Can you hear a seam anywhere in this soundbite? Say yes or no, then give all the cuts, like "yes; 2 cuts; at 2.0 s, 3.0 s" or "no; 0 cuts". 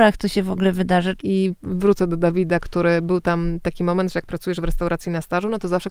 yes; 1 cut; at 1.2 s